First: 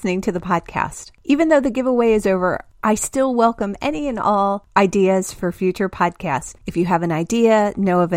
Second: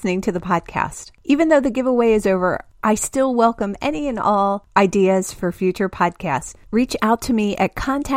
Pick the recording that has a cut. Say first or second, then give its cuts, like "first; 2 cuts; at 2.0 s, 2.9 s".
first; 1 cut; at 6.6 s